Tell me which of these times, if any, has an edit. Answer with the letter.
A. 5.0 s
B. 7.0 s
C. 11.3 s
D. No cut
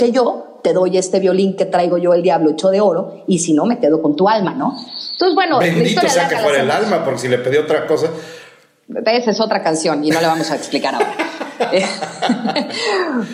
D